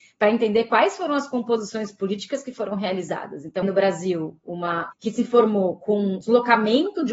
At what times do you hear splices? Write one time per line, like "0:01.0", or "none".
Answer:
0:03.6
0:04.9
0:06.2